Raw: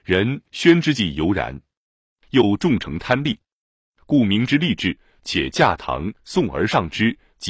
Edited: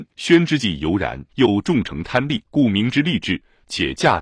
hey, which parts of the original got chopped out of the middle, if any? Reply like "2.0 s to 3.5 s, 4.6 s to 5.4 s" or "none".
1.6 s to 2.2 s, 3.4 s to 4.0 s